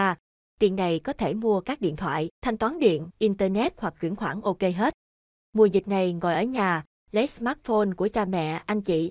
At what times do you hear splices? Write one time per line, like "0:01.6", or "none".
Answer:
0:03.1